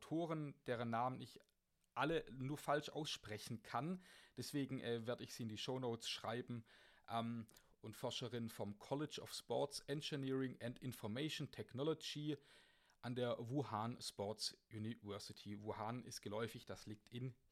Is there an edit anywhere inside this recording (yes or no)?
yes